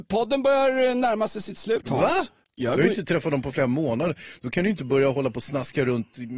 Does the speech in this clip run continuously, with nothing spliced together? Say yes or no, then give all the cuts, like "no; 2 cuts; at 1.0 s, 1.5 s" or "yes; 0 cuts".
no; 1 cut; at 2.4 s